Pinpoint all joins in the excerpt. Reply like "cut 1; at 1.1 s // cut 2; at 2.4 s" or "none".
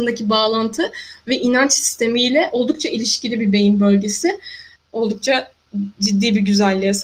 cut 1; at 4.8 s